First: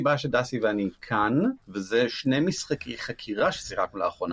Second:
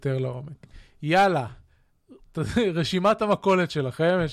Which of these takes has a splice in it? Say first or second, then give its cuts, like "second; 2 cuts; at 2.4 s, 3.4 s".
first; 1 cut; at 1.6 s